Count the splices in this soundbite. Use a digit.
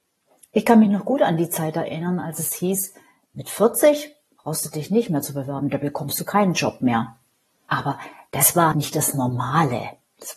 2